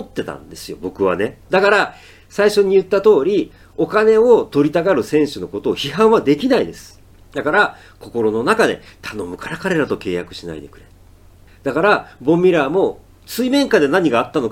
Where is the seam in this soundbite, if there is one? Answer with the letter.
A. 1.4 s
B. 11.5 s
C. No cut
A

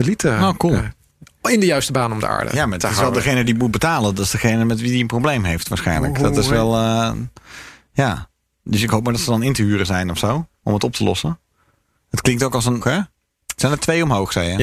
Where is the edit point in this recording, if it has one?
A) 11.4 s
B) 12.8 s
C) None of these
B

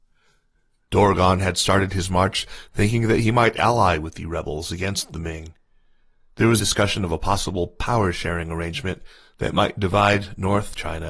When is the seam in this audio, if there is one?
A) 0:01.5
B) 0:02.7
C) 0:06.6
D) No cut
C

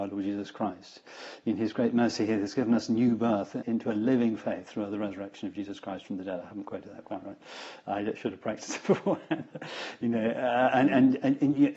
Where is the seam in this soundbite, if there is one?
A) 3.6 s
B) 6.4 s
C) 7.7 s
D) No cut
A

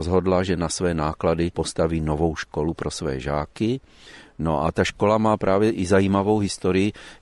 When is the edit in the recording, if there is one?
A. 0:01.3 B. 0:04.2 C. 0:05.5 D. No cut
B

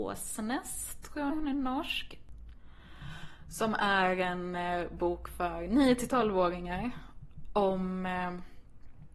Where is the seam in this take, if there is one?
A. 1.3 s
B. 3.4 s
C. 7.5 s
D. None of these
A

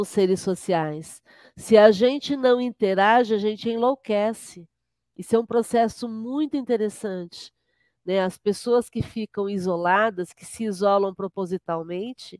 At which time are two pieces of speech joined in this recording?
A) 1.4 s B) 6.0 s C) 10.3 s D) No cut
D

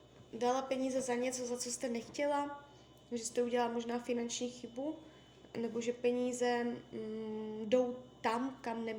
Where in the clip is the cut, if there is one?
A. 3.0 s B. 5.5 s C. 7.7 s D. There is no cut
D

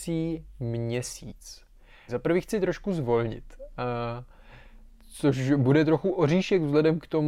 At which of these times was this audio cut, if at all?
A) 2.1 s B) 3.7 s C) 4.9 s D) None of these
A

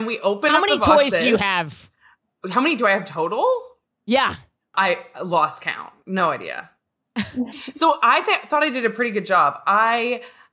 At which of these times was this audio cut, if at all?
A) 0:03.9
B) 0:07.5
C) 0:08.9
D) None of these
B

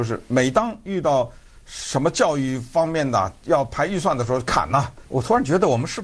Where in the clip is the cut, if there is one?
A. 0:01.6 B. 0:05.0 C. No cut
B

